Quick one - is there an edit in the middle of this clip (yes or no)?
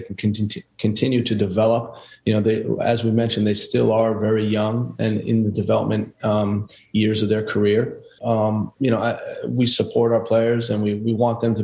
yes